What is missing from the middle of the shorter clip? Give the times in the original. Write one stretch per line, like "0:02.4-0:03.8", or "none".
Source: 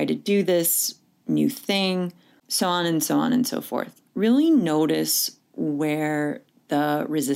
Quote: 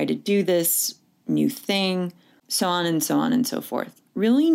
none